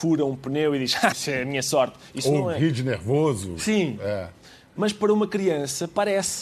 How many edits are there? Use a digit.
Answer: 1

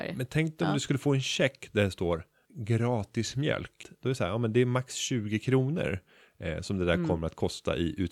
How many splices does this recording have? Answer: 2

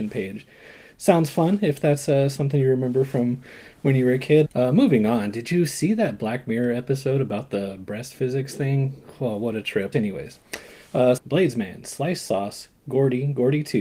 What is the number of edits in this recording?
3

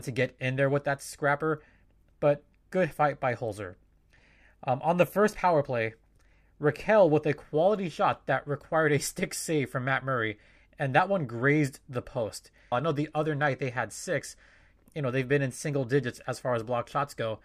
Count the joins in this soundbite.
1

